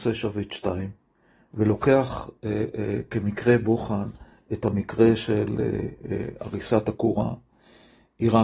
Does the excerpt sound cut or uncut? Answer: uncut